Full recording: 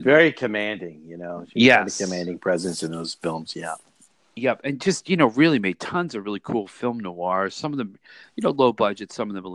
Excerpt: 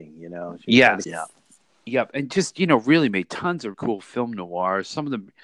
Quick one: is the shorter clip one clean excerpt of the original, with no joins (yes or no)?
no